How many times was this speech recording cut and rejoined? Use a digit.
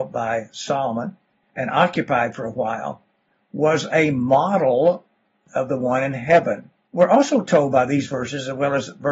1